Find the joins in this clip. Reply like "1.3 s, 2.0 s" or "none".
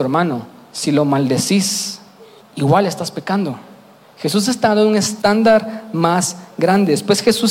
2.4 s, 4.0 s